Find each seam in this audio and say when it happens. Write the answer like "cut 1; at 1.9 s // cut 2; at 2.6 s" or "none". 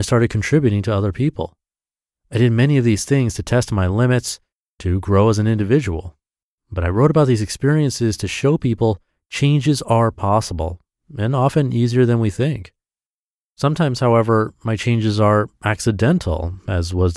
none